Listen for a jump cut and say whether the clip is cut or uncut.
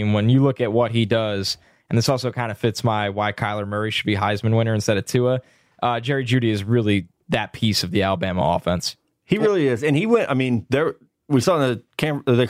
uncut